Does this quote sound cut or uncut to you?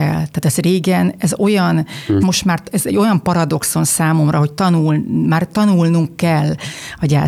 cut